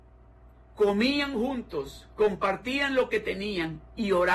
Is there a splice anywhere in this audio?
no; 0 cuts

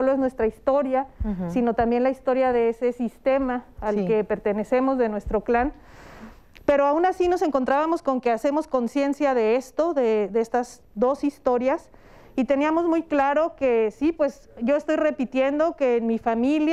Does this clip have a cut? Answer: no; 0 cuts

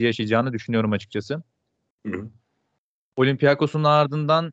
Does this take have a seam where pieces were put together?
no; 0 cuts

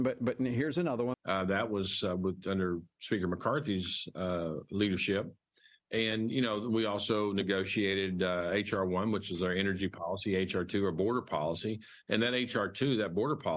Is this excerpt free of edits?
no; 1 cut; at 1.1 s

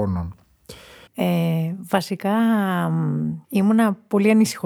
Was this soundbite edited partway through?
yes; 2 cuts; at 1.1 s, 3.4 s

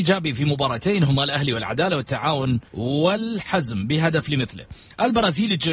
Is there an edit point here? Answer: yes; 1 cut; at 2.7 s

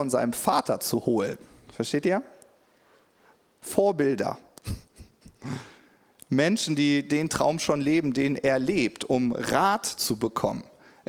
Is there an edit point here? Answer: no; 0 cuts

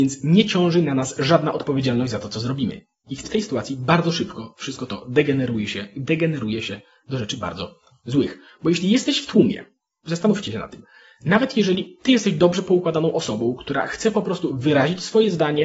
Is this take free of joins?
no; 1 cut; at 3.2 s

